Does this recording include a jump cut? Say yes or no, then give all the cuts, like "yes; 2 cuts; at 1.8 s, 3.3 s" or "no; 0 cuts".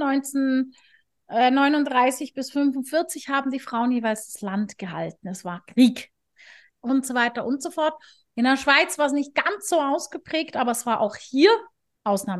yes; 2 cuts; at 6.7 s, 8.3 s